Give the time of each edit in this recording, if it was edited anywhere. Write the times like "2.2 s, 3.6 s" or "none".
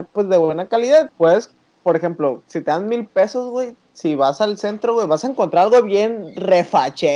1.1 s